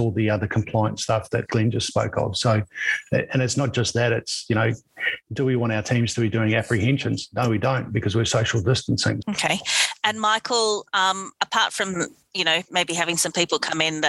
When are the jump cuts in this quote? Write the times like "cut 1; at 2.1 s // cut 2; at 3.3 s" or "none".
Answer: cut 1; at 9.2 s

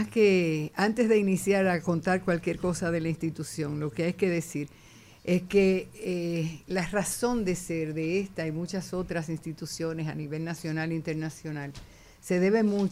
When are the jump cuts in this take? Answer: none

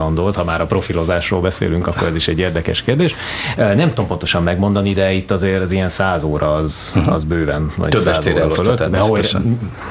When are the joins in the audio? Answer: none

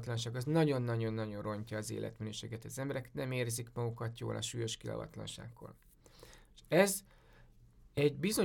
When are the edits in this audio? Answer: none

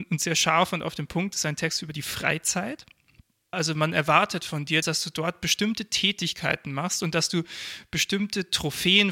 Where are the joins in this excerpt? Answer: cut 1; at 3.5 s // cut 2; at 4.8 s

